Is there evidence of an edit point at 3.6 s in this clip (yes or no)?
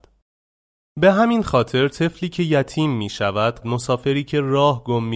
yes